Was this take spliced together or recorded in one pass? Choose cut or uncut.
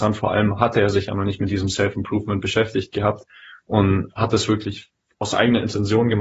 uncut